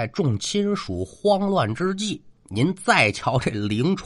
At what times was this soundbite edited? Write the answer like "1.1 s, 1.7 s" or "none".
2.3 s